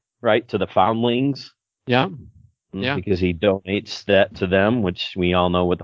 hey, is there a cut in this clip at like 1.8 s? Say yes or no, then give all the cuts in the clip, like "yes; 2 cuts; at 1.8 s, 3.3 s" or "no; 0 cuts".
no; 0 cuts